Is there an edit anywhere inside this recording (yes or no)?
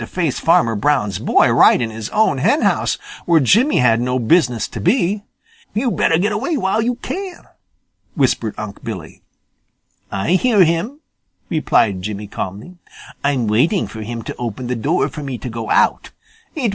yes